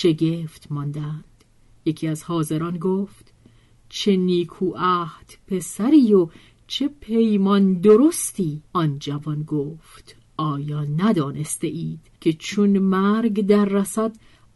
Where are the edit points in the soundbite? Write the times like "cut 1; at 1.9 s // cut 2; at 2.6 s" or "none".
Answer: cut 1; at 8.7 s // cut 2; at 12.2 s